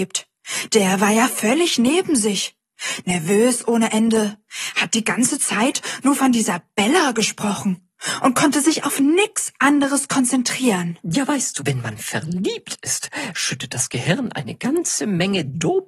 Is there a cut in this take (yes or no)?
yes